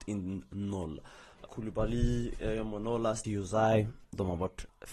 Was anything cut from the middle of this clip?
yes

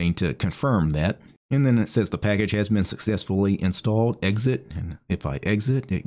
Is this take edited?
no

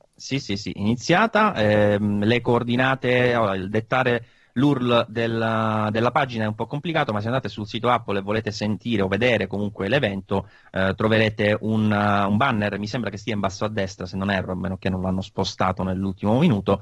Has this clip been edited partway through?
no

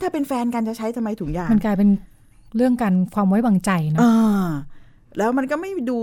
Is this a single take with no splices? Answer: yes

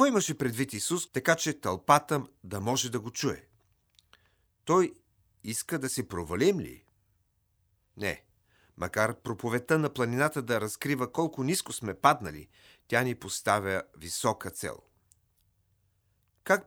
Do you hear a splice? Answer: yes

